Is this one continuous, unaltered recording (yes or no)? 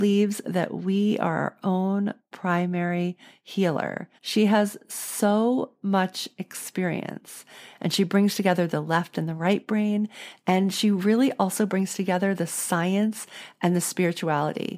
no